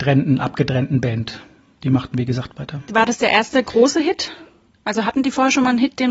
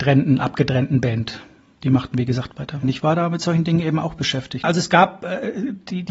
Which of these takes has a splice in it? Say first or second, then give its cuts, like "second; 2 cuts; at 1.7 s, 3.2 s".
second; 2 cuts; at 2.8 s, 4.6 s